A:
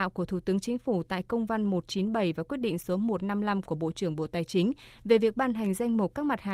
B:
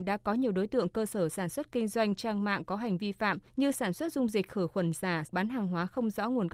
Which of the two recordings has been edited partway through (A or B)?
B